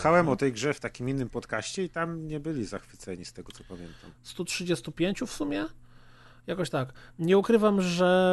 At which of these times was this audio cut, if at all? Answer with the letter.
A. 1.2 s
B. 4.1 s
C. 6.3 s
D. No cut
B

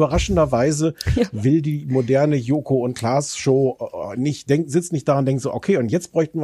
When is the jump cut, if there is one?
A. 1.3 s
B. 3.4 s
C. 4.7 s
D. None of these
D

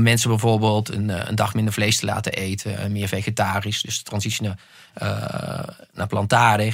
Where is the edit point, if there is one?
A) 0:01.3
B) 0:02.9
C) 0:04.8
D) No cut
D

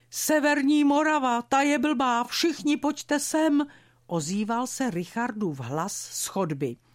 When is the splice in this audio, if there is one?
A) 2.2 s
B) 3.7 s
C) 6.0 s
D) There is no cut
D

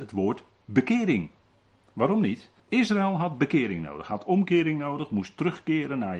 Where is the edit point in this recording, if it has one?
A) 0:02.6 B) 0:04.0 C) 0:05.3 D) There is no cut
A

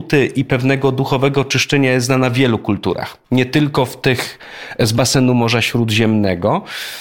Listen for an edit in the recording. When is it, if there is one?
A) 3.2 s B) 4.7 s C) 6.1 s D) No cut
A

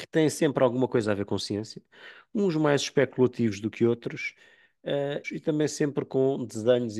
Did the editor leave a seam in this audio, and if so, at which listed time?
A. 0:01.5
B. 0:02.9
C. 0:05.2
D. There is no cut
C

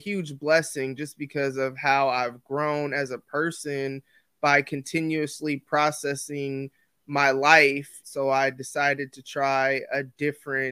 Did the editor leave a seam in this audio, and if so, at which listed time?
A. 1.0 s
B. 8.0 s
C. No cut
B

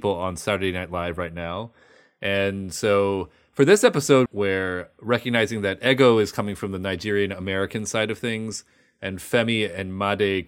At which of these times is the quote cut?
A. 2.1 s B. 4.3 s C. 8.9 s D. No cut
B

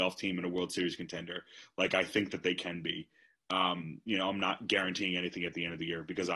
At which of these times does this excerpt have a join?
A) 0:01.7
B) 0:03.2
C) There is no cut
C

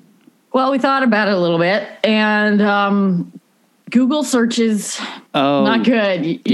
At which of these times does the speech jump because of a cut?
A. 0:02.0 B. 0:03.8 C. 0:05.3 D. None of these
C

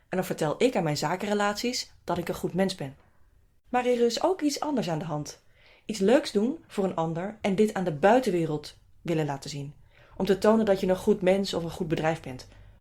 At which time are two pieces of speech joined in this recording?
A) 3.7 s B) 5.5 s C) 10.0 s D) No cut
A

